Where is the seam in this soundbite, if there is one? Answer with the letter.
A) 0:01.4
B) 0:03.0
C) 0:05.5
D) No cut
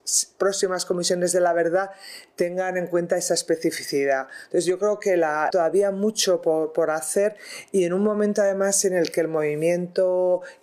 C